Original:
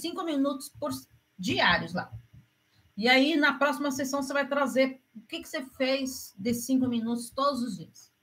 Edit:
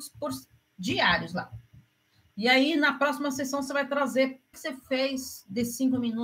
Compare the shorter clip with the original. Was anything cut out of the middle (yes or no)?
yes